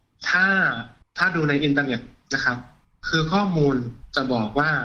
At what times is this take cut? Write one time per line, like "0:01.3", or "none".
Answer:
none

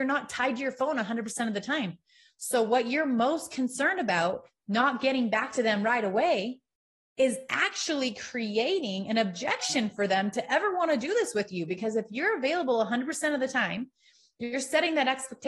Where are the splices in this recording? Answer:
none

